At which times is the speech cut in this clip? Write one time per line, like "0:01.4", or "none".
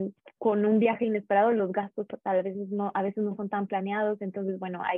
none